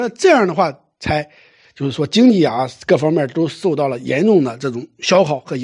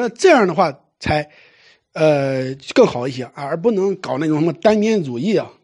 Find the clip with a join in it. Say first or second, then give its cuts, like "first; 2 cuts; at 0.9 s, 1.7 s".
first; 1 cut; at 1.6 s